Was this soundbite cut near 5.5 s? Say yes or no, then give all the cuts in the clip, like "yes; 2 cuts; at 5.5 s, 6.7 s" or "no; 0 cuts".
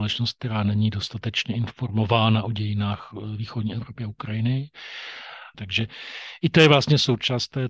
yes; 1 cut; at 5.5 s